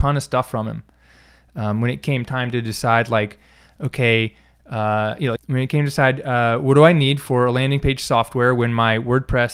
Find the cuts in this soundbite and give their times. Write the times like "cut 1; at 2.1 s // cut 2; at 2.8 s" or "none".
cut 1; at 5.4 s